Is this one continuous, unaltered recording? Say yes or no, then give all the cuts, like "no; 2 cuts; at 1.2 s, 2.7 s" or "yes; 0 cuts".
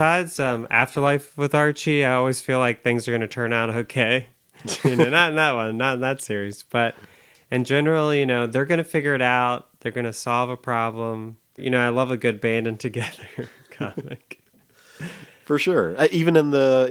no; 1 cut; at 11.6 s